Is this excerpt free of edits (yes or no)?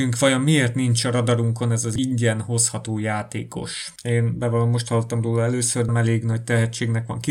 no